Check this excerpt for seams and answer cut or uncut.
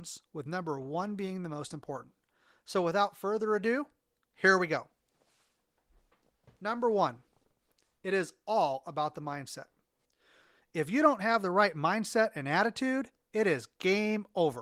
uncut